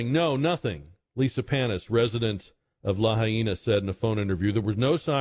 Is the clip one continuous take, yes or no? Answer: yes